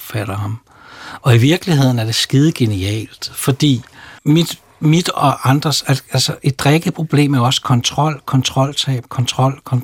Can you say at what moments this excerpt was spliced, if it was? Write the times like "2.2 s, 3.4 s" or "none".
4.2 s